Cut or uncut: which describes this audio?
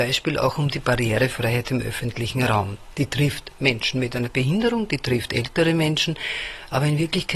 uncut